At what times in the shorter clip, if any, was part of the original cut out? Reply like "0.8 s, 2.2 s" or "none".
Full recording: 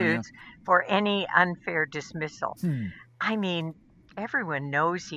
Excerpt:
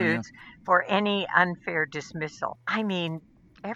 2.6 s